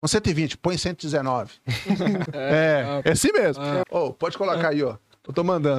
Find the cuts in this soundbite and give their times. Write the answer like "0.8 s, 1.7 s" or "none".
2.3 s, 3.8 s